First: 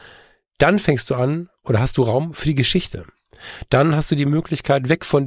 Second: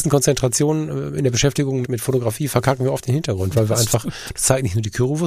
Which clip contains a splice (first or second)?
second